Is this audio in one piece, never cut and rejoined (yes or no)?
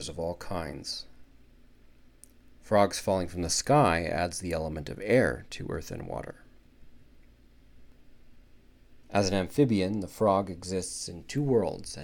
no